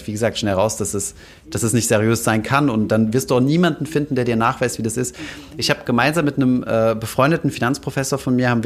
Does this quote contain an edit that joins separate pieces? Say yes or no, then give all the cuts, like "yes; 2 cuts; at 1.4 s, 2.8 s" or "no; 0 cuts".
no; 0 cuts